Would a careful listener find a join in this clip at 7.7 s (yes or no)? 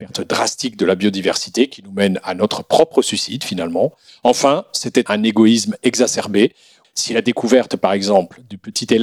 no